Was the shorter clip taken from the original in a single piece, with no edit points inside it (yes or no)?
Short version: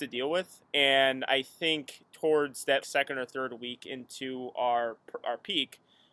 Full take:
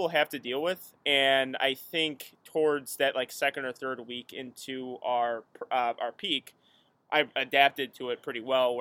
no